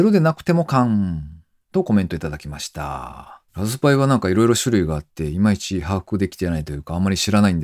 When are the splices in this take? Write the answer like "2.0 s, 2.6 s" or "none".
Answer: 3.5 s